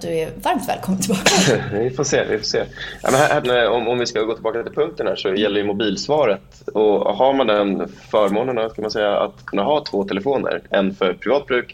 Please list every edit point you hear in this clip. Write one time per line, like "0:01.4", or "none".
0:03.4
0:06.7